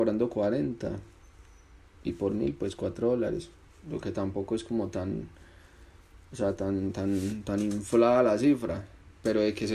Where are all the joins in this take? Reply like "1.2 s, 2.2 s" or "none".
none